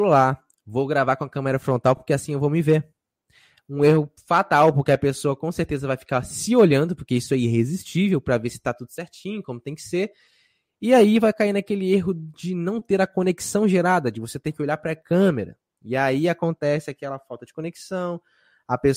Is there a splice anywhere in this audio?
no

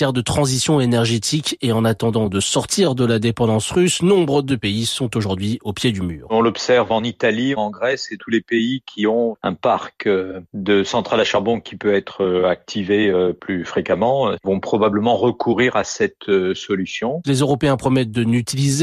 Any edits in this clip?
yes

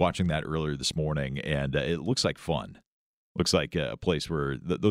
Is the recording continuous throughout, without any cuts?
yes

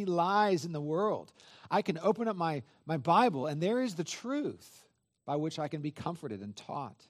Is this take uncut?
yes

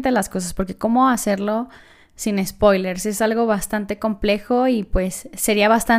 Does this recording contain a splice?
no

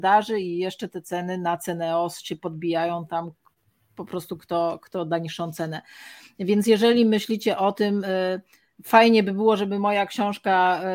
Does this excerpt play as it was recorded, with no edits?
yes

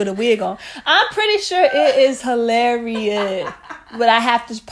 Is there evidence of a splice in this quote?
no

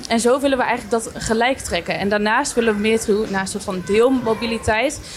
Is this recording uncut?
yes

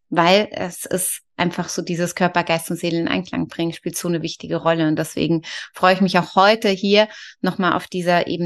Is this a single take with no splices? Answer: yes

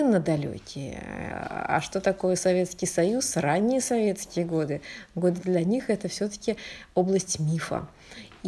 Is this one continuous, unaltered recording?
no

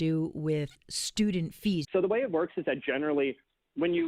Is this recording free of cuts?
no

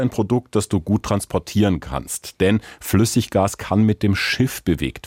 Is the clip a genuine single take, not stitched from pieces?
yes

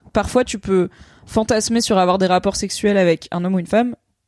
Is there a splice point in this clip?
no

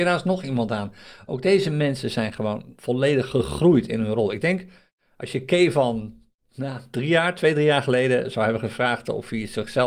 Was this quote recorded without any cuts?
yes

